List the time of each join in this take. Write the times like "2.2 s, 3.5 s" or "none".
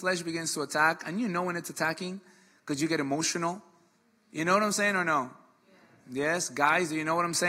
none